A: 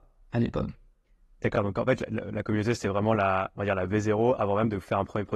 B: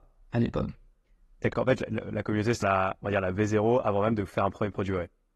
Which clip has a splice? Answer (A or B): B